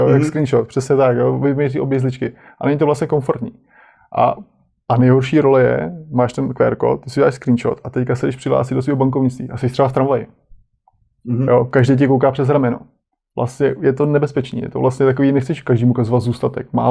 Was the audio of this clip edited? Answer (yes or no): no